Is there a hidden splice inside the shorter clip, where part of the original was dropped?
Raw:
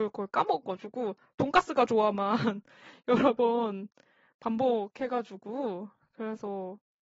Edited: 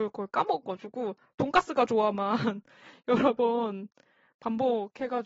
no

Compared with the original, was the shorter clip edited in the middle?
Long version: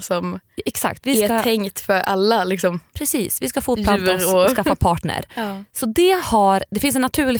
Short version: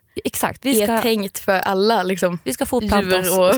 yes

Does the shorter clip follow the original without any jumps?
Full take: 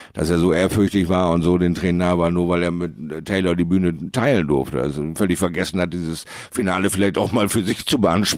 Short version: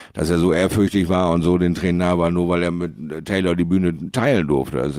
yes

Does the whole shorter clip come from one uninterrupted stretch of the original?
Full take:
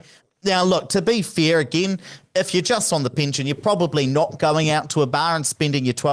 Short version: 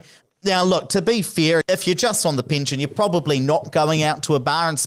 no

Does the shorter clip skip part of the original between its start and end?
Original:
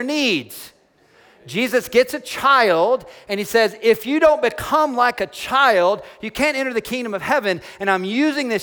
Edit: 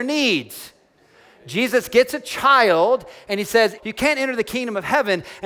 yes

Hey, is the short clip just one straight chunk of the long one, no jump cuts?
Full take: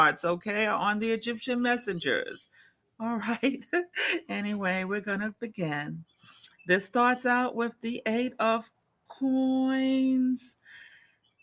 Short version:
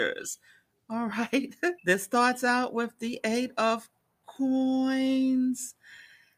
no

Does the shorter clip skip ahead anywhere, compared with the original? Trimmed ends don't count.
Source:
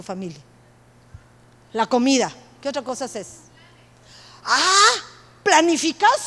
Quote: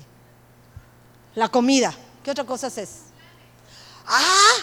no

